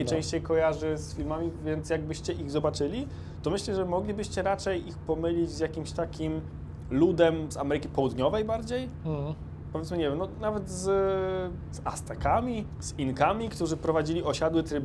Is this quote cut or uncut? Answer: uncut